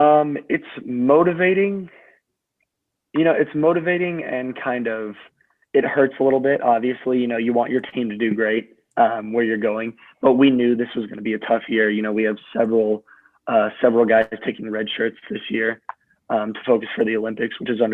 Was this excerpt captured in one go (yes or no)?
yes